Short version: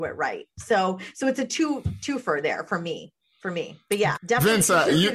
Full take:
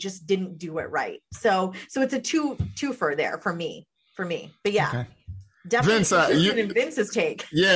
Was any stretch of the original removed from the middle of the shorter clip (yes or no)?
yes